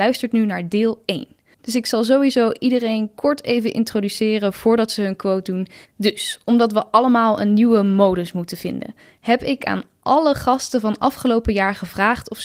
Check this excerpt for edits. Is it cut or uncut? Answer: cut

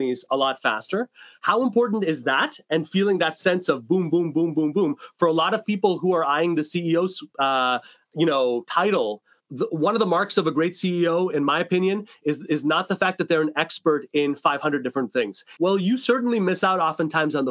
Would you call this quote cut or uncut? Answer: cut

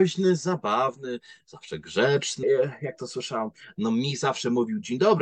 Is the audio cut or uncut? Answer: cut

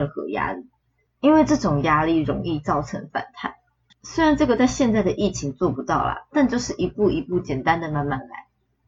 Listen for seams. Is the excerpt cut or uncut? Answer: cut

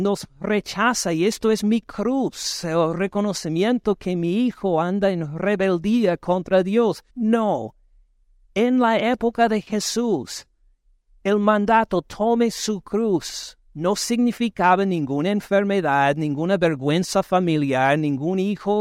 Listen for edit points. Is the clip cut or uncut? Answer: cut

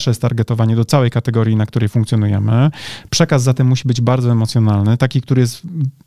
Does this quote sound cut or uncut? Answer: uncut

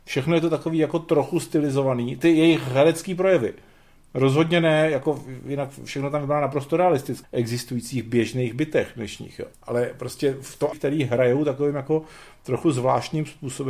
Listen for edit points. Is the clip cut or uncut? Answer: cut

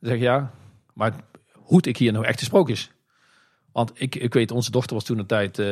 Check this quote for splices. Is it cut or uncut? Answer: uncut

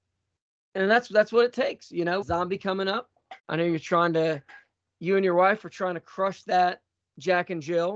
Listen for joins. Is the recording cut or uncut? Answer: cut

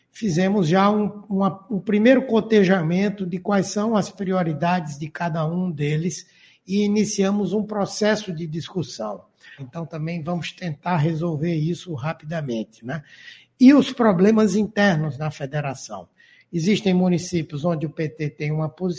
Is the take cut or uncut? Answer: cut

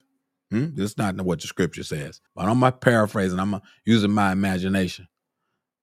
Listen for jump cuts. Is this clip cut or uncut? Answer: cut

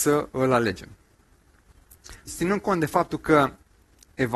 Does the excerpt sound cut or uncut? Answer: cut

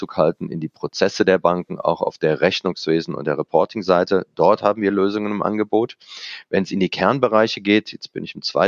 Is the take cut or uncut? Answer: uncut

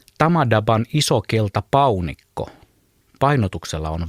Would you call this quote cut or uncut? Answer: uncut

